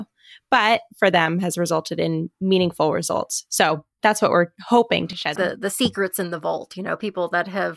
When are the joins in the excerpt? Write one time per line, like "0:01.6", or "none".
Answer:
0:05.4